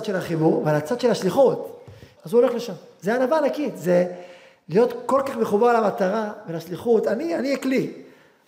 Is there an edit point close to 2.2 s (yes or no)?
yes